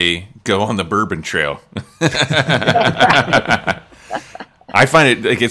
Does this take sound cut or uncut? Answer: uncut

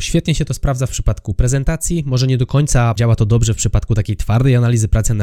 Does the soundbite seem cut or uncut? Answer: uncut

